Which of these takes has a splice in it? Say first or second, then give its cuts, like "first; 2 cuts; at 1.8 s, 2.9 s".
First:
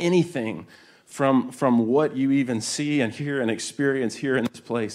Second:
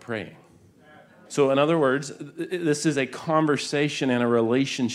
second; 1 cut; at 1.3 s